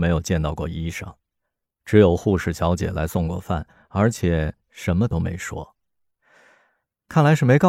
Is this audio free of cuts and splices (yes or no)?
yes